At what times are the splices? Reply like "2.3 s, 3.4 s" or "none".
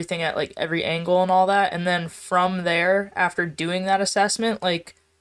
none